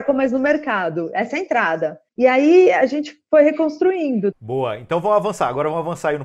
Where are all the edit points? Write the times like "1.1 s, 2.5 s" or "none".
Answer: 2.1 s, 4.3 s